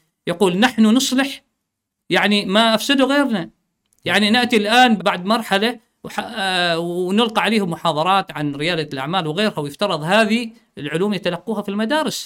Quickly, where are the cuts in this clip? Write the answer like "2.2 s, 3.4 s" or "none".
5.0 s